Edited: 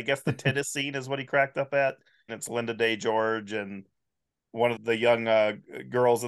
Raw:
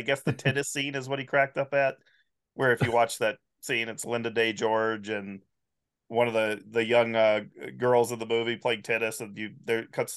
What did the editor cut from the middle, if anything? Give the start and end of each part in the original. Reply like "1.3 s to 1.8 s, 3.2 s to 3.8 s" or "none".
2.3 s to 3.8 s, 6.3 s to 6.6 s